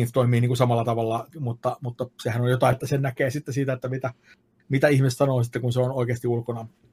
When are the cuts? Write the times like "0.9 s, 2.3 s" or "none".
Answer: 1.3 s, 2.7 s